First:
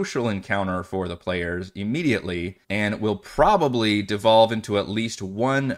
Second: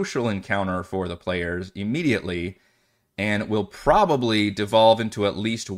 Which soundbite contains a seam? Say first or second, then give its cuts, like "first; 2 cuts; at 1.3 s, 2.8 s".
first; 1 cut; at 2.6 s